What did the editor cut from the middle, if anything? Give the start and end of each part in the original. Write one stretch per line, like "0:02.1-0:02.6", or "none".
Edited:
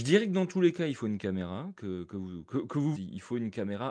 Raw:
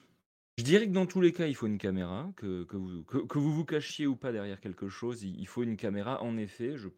0:03.5-0:05.2